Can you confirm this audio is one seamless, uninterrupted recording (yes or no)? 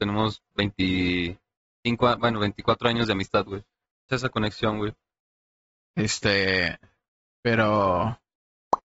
no